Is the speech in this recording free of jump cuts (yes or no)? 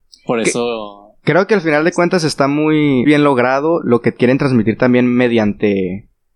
no